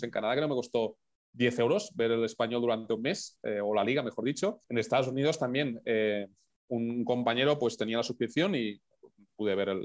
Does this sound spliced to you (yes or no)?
yes